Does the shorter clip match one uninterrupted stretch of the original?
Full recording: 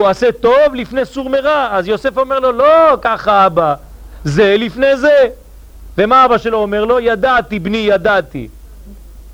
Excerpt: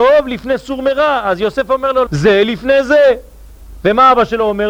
no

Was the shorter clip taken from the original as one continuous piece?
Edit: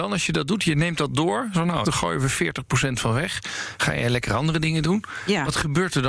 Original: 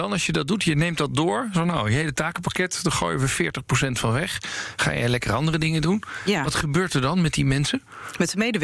no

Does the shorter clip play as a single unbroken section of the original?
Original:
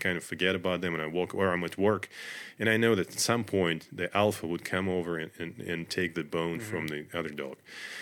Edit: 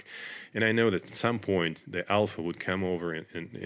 yes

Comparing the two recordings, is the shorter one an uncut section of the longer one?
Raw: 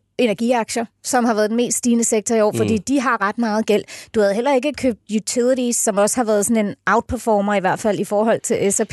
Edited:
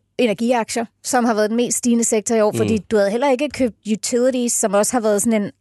no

